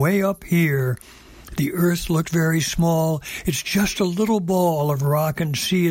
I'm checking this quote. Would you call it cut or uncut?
uncut